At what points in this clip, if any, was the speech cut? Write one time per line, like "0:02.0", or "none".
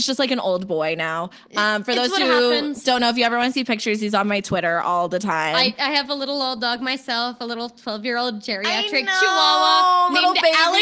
none